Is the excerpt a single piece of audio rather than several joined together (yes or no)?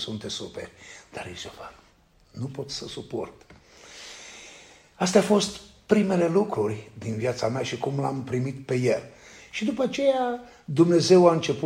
yes